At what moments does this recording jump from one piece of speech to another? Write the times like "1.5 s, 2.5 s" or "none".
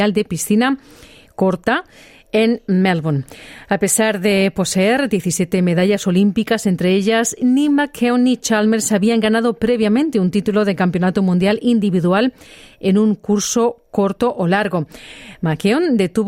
none